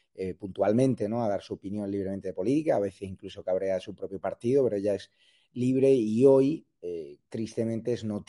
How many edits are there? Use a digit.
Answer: 1